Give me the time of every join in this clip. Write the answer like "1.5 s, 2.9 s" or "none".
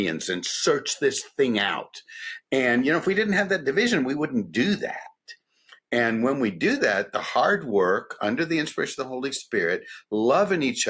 none